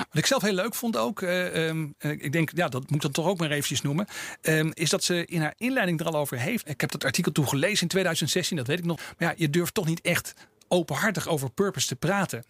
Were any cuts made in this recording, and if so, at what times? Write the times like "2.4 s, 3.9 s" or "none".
6.6 s, 9.0 s